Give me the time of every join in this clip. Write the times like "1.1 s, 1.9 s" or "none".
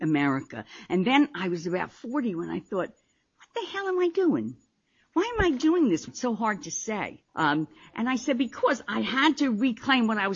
6.1 s, 7.3 s